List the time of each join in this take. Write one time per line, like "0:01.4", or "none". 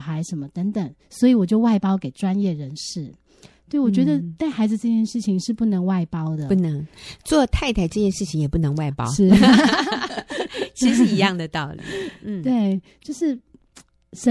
none